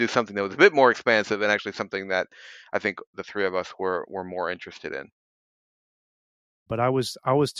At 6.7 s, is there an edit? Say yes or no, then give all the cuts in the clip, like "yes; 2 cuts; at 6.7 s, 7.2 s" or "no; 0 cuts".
yes; 1 cut; at 6.7 s